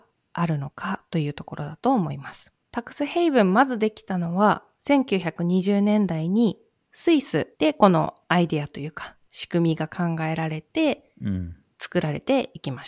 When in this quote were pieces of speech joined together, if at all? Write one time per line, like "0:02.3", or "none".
0:02.6
0:07.5